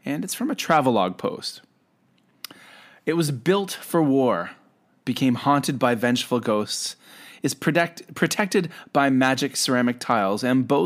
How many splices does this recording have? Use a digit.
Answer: 0